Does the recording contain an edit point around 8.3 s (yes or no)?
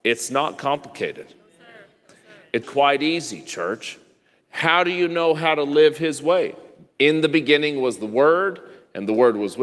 no